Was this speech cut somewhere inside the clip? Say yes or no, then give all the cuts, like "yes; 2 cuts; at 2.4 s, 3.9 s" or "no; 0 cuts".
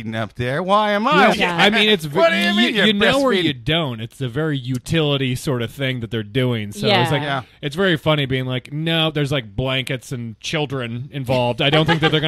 yes; 1 cut; at 1.3 s